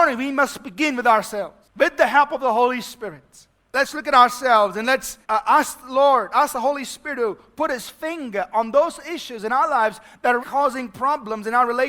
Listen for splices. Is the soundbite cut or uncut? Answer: cut